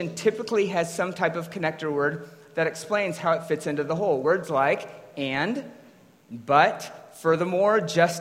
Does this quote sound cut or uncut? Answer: uncut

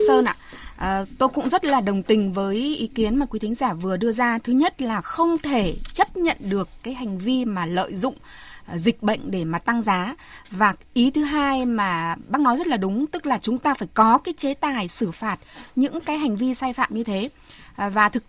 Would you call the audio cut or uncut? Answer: uncut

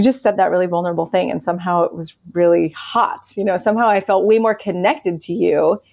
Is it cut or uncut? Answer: uncut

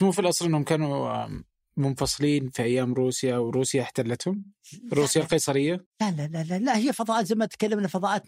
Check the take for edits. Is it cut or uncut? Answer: uncut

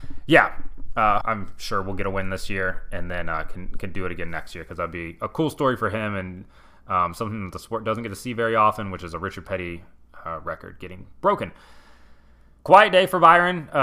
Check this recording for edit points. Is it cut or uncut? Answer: cut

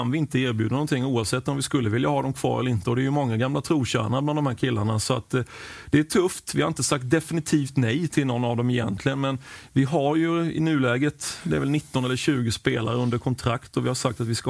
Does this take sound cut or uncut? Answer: cut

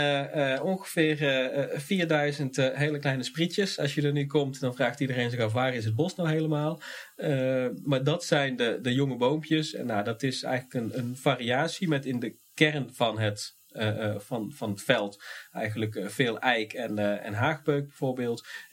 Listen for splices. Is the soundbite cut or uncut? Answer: uncut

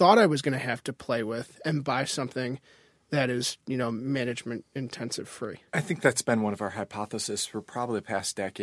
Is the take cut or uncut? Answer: cut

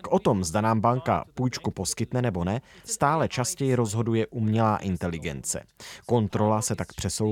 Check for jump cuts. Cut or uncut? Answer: uncut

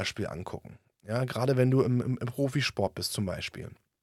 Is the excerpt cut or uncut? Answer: uncut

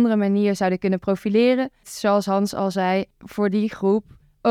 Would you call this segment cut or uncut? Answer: cut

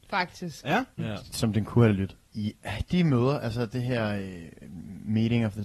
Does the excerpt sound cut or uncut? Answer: cut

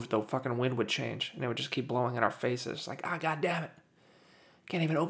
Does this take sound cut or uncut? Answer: uncut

